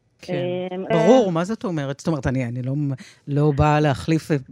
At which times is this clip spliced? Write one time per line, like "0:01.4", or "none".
0:00.9